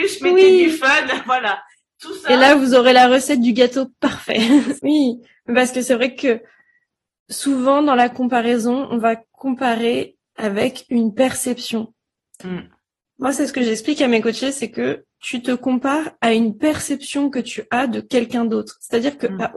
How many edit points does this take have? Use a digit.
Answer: 2